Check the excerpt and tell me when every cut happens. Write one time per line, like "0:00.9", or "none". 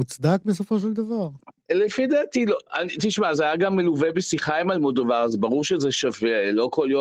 0:01.6